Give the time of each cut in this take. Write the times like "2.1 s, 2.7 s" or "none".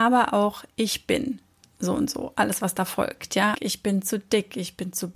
3.5 s